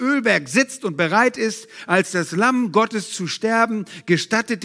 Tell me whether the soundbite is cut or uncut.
uncut